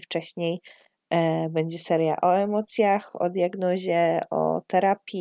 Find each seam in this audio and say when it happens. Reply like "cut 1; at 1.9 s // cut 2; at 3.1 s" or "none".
none